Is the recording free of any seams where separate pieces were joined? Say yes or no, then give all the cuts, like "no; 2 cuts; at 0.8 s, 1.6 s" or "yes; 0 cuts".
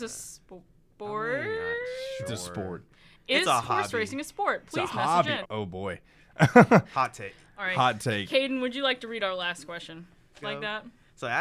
no; 2 cuts; at 5.4 s, 10.4 s